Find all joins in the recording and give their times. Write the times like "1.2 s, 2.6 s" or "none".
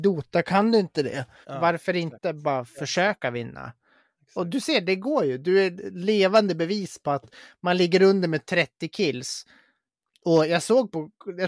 1.4 s